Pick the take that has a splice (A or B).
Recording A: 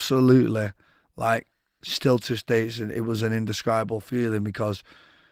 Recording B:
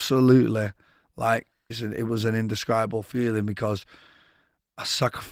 B